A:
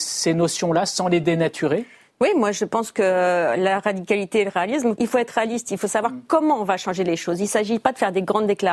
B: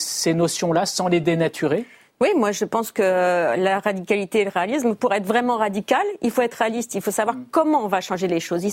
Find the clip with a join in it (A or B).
A